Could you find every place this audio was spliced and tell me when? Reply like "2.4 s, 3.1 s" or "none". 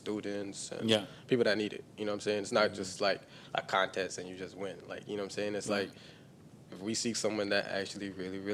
none